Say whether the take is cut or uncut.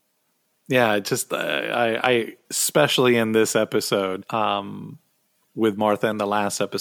cut